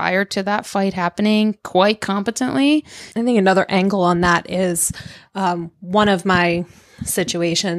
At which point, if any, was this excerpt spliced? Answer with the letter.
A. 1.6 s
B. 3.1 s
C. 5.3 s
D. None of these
B